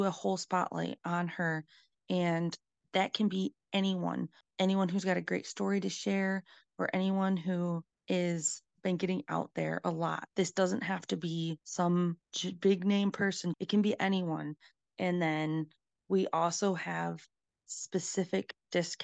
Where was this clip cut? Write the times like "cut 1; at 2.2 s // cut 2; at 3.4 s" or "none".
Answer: cut 1; at 13.5 s